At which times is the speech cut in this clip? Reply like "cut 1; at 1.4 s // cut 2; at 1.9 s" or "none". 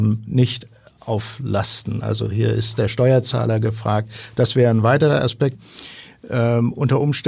cut 1; at 5.5 s